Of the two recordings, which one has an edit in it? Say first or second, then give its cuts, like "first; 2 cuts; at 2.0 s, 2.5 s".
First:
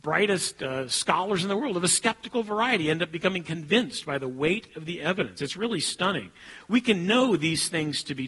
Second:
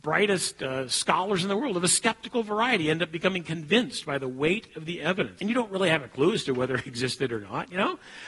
second; 2 cuts; at 5.4 s, 6.9 s